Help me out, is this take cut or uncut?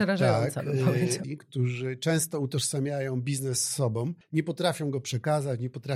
cut